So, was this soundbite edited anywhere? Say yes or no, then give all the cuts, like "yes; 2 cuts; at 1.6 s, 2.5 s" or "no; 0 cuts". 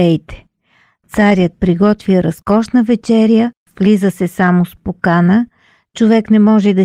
yes; 1 cut; at 3.7 s